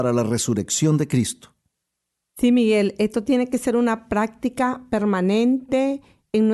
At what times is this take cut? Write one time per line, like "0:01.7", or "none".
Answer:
0:02.2

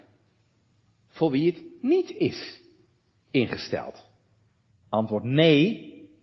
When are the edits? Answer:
0:04.7

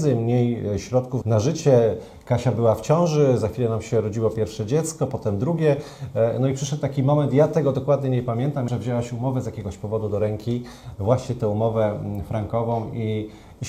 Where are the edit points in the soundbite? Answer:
0:01.2
0:08.7

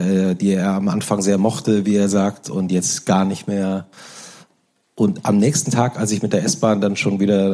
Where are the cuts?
none

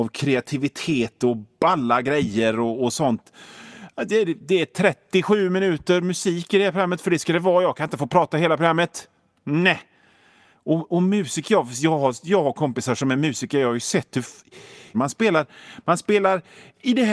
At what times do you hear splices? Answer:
0:14.9

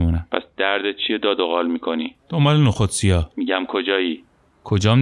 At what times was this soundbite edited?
0:02.2
0:03.3

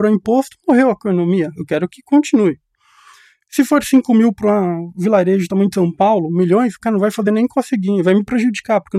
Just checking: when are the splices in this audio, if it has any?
none

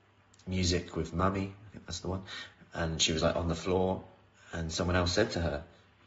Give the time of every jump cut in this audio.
none

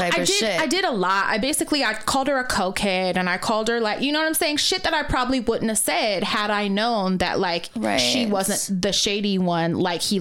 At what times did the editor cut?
none

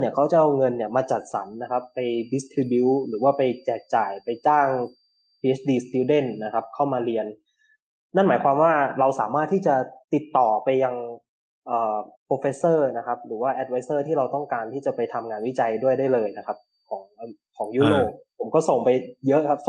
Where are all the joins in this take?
0:10.0
0:12.1

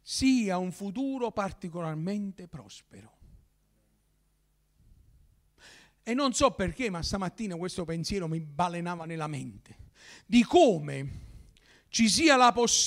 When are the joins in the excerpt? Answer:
none

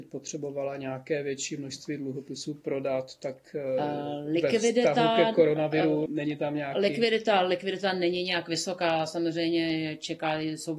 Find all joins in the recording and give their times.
0:06.1

